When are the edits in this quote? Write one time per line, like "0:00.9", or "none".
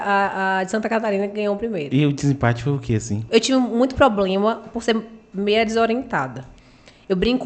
0:03.3